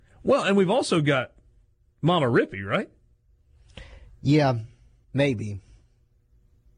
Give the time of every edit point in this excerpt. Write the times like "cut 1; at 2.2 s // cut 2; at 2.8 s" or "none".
cut 1; at 5.0 s